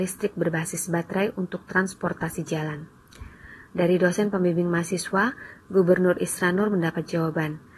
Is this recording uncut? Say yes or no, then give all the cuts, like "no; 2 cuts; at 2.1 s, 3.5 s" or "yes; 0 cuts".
yes; 0 cuts